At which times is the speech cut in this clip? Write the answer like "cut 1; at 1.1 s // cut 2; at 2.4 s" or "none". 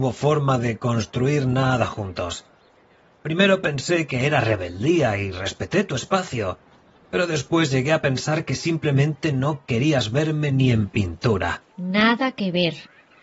cut 1; at 11.7 s